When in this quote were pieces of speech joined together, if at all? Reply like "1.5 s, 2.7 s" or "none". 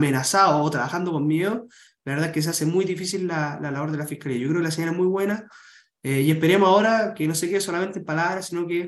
none